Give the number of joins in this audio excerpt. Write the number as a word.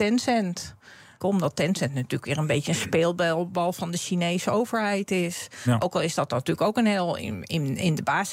one